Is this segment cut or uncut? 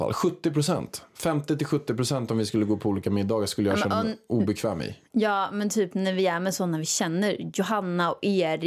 uncut